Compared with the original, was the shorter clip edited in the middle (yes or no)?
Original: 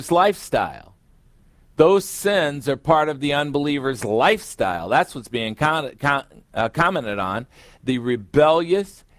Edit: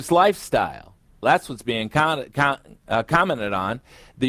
yes